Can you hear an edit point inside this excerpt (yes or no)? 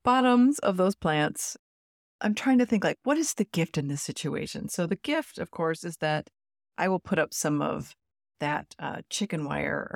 no